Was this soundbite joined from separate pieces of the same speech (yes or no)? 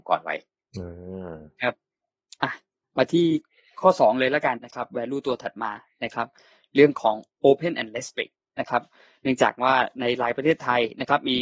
yes